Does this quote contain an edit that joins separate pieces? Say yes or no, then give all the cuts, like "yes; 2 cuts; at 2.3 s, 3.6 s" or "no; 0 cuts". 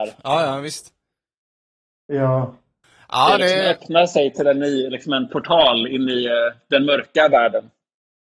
no; 0 cuts